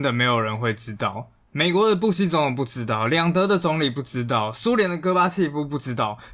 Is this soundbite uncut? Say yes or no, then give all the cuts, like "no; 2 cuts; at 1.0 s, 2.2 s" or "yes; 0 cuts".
yes; 0 cuts